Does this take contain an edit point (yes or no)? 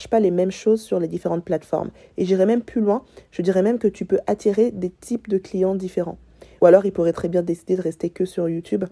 yes